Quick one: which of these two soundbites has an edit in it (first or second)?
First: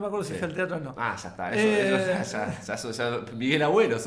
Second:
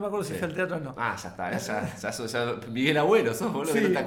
second